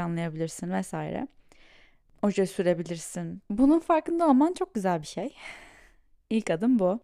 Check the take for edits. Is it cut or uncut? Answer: cut